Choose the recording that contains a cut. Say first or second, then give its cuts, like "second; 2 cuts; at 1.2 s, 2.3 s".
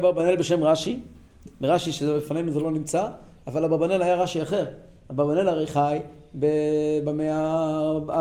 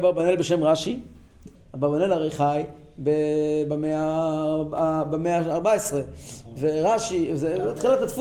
second; 1 cut; at 1.6 s